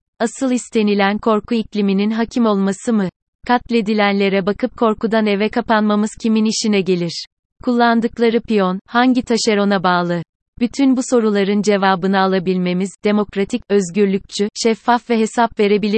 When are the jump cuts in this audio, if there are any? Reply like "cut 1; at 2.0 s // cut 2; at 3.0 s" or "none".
none